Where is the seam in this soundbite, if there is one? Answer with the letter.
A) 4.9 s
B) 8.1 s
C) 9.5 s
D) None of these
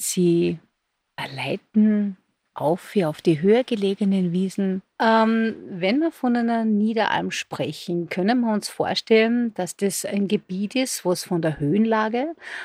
A